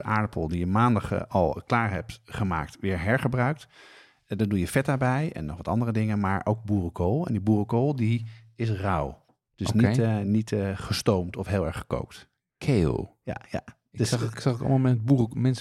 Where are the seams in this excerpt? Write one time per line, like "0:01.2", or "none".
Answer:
none